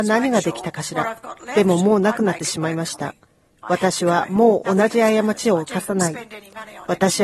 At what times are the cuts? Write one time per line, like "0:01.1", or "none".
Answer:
none